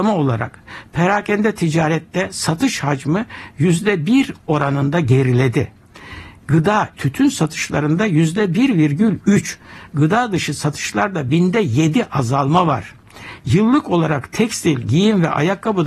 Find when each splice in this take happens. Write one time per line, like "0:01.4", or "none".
0:06.9
0:13.4